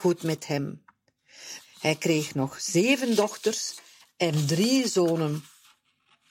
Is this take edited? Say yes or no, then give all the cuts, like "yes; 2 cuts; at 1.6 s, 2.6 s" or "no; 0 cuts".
yes; 1 cut; at 1.6 s